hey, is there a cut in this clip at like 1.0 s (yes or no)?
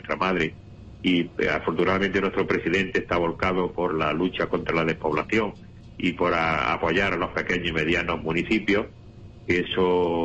no